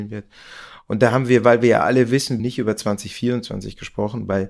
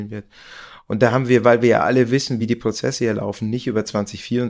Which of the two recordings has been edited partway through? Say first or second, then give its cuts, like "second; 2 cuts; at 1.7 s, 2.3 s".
first; 1 cut; at 2.4 s